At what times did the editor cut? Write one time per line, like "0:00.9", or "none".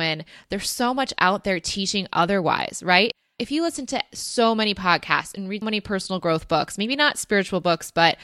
0:05.6